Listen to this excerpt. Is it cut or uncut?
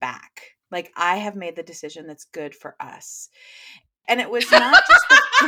cut